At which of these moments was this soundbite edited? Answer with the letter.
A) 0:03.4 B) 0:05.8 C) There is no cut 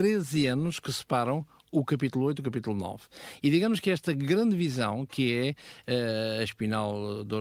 C